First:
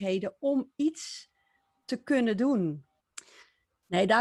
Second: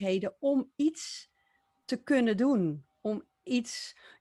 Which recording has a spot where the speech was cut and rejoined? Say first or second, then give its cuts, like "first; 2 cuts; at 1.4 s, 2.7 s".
first; 1 cut; at 3.0 s